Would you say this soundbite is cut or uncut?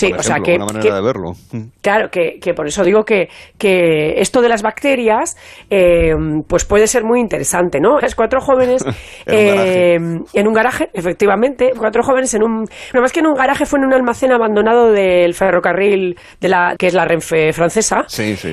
cut